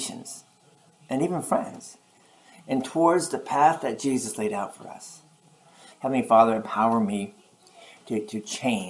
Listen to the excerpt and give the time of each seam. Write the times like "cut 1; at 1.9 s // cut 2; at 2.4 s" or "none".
cut 1; at 5.9 s